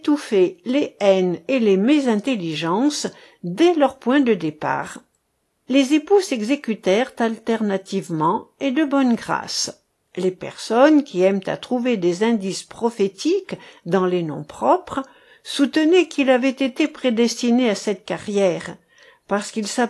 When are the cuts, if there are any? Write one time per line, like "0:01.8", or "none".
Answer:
0:05.6
0:10.0